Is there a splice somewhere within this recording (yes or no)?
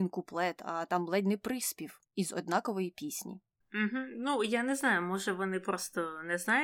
yes